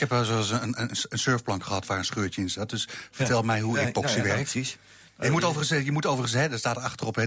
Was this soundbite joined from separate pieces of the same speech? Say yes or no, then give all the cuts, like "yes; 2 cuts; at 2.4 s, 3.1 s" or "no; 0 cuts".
no; 0 cuts